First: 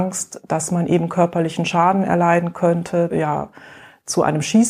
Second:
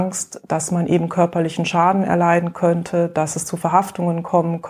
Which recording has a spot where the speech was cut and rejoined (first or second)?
first